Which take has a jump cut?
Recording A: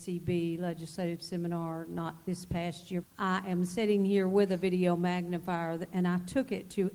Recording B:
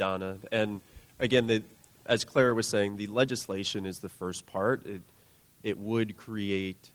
A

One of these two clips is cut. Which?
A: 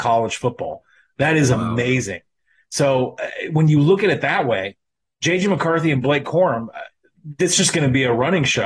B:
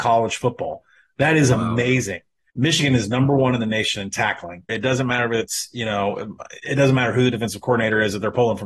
B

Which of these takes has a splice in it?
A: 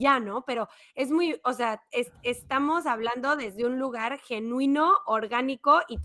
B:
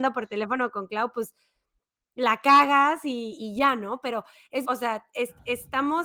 B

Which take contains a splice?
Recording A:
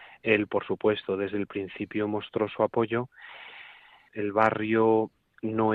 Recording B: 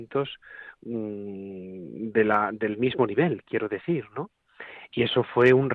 A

